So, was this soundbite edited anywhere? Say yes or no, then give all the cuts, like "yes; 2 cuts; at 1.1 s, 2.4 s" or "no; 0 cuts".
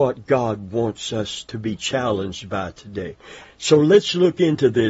yes; 1 cut; at 3.4 s